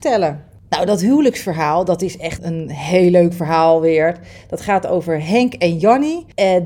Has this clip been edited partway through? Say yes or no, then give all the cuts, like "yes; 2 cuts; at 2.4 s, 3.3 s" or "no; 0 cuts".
yes; 1 cut; at 2.4 s